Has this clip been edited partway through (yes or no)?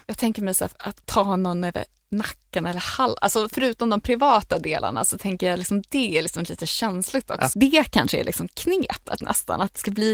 yes